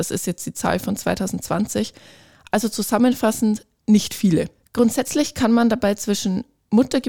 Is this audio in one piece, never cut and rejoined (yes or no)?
yes